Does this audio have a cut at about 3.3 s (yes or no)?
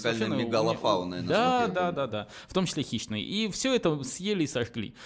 no